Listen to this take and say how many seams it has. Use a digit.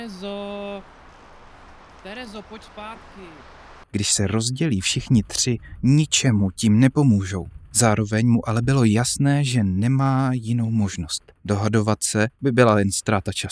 1